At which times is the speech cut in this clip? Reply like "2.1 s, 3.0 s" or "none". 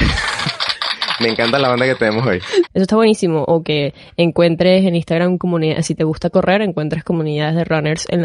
2.7 s